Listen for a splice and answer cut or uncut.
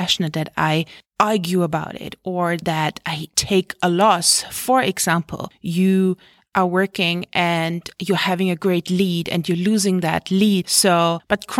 cut